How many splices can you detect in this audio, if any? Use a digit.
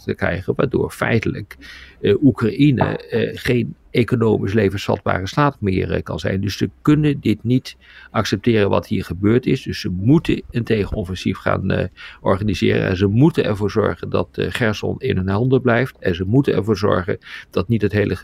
0